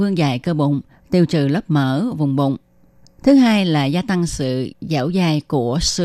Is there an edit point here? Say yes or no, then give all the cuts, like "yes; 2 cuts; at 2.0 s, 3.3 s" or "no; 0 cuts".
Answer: no; 0 cuts